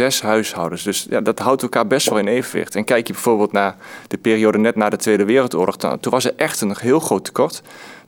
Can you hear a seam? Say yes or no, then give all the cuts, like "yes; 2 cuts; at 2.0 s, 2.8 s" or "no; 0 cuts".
no; 0 cuts